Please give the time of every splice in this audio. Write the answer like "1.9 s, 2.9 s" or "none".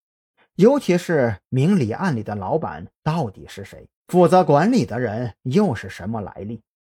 4.0 s